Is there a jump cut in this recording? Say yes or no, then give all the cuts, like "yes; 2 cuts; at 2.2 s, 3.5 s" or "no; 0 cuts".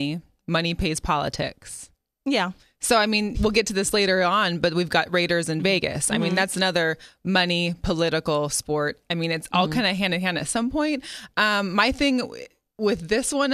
yes; 1 cut; at 3.3 s